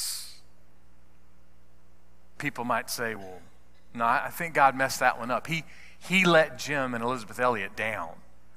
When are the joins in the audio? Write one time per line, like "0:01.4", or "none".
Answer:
none